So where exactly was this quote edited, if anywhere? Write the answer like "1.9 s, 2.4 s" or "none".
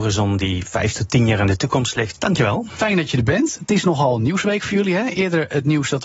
2.1 s